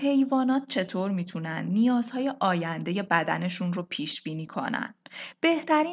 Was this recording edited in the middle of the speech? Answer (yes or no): no